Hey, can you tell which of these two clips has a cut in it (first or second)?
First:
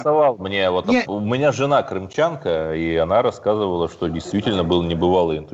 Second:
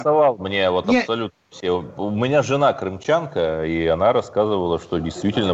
first